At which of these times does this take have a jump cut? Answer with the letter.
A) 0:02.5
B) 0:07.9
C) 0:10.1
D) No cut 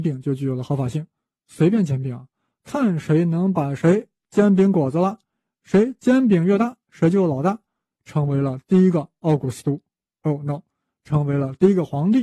B